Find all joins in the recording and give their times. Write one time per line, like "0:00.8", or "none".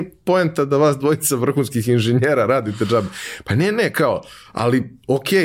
none